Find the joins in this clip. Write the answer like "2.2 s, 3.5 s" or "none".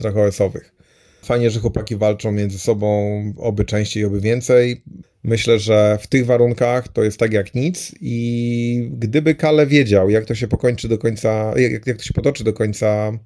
1.2 s, 5.0 s